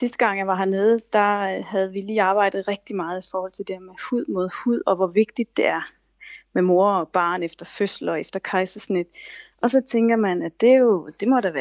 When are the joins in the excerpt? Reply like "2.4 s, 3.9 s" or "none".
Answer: none